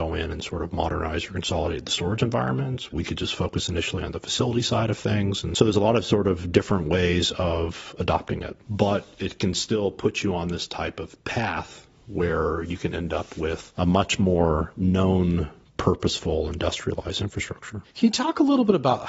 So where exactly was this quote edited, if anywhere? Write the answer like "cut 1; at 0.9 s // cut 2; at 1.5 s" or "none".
cut 1; at 2.9 s